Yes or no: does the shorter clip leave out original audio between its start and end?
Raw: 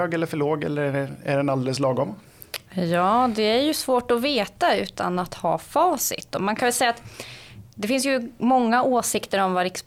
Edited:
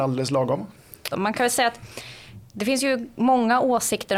yes